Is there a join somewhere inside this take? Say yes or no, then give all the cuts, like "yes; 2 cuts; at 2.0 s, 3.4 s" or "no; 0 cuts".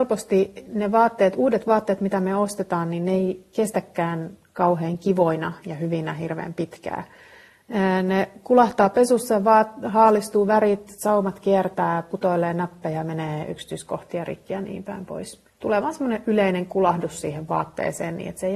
yes; 1 cut; at 15.5 s